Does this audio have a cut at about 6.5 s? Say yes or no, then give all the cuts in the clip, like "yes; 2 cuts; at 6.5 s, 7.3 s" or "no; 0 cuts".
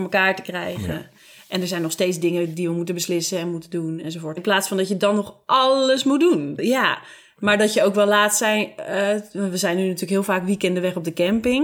yes; 2 cuts; at 4.4 s, 6.5 s